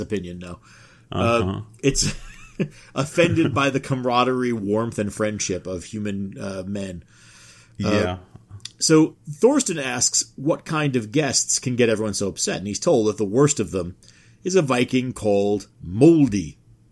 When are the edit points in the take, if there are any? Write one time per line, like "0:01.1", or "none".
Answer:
0:15.7